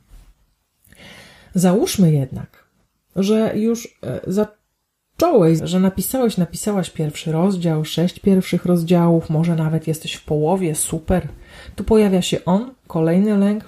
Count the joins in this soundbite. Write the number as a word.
one